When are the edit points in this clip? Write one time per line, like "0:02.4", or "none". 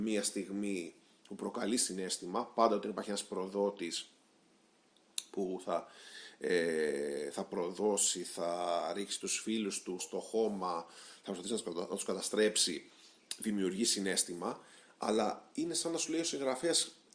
0:10.0